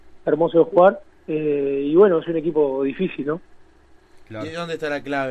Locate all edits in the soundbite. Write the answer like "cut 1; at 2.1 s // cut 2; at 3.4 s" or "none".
cut 1; at 1.2 s